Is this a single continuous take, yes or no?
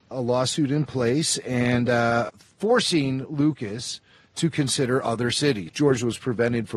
no